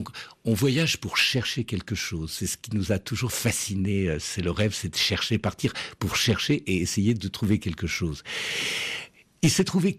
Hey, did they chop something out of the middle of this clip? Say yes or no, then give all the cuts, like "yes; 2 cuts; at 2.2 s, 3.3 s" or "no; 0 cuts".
no; 0 cuts